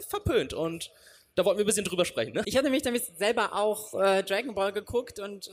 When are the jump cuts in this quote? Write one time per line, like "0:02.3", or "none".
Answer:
0:02.4